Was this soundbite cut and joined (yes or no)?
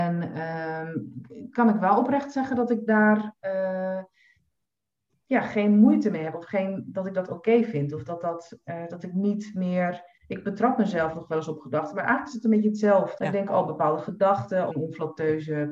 yes